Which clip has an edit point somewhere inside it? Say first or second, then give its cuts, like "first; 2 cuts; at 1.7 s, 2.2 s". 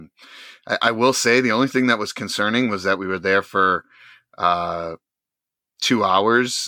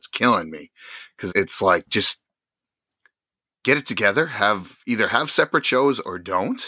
second; 1 cut; at 1.3 s